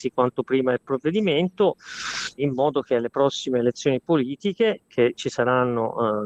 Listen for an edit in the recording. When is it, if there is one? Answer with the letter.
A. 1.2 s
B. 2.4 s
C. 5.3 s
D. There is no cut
B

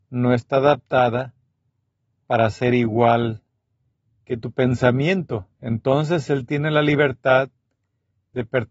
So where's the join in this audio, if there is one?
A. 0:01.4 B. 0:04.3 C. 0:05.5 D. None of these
C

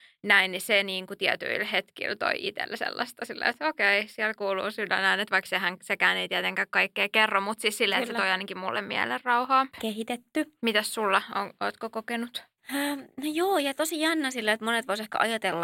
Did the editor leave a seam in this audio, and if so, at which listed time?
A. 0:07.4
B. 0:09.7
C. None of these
B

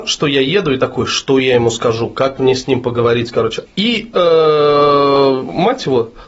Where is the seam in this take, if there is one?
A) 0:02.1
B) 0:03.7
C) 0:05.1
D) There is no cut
B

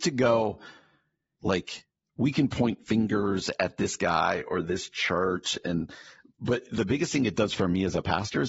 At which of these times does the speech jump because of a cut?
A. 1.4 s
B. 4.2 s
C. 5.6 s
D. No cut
A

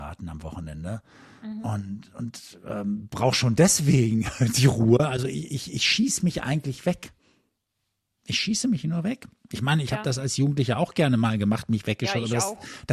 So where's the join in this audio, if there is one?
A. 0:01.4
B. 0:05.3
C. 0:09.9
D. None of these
D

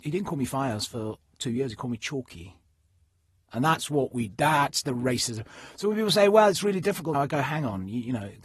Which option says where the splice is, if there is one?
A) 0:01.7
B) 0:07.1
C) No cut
B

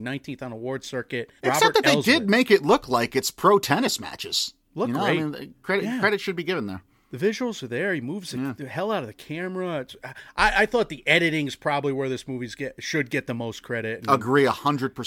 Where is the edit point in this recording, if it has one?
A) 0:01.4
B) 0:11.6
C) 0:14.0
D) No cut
A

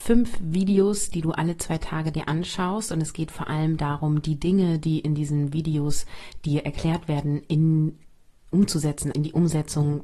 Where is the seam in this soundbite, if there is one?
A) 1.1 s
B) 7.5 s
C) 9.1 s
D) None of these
C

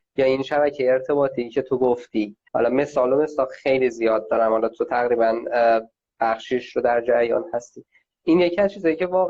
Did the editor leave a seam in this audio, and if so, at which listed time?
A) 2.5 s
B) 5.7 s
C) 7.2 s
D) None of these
A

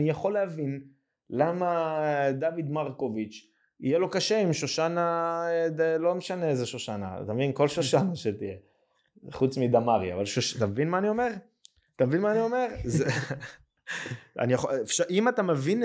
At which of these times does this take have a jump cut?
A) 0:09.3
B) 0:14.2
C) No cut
C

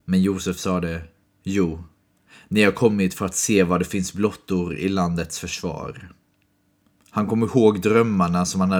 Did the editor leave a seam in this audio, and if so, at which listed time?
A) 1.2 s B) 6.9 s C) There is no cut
B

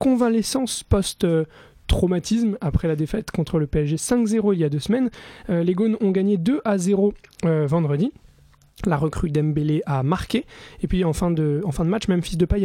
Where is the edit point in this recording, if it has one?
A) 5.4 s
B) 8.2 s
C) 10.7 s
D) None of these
D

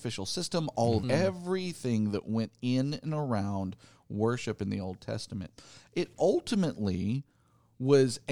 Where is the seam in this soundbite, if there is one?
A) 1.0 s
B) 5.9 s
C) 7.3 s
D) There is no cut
A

